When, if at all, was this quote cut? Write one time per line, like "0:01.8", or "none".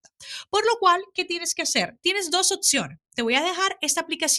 none